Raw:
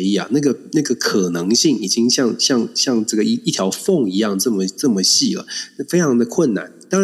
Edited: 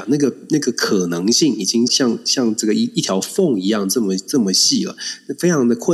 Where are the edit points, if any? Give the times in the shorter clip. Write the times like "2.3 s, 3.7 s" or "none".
1.9 s

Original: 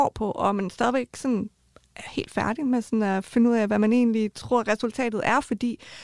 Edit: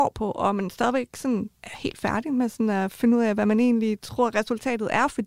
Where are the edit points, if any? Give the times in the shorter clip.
1.5 s

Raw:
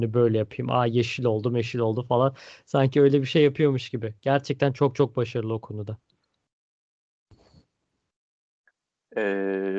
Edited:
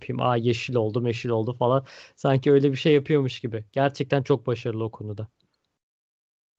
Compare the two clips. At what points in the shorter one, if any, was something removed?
4.2 s

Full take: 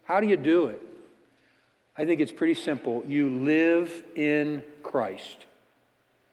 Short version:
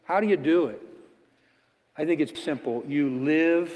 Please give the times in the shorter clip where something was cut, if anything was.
2.3 s

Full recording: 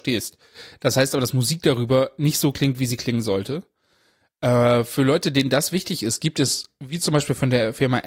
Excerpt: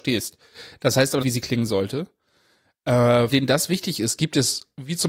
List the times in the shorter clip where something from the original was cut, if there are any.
1.2 s, 3.3 s

